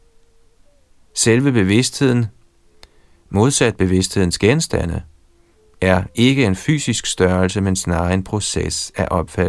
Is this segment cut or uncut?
uncut